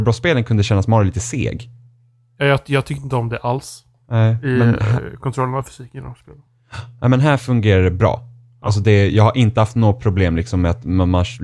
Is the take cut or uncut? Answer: uncut